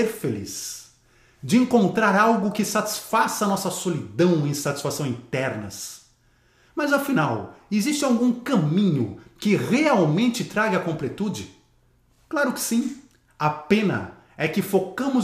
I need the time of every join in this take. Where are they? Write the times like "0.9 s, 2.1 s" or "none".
none